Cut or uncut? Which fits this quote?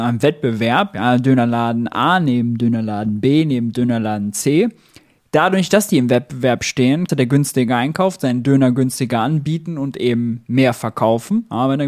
cut